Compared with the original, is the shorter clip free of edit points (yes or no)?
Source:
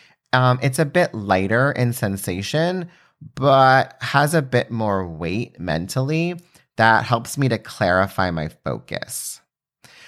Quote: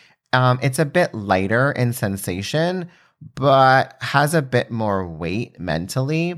yes